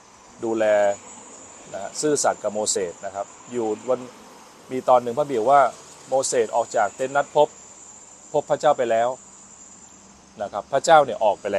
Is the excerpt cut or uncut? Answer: uncut